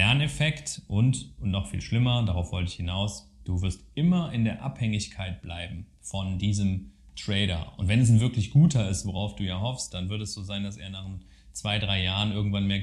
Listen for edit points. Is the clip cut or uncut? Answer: uncut